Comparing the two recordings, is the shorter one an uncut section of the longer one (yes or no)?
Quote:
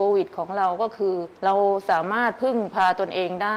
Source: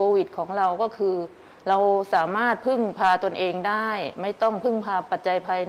no